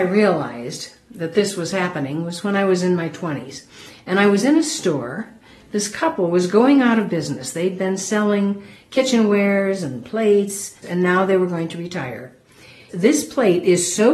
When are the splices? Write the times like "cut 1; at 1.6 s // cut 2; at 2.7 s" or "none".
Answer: cut 1; at 10.8 s // cut 2; at 12.9 s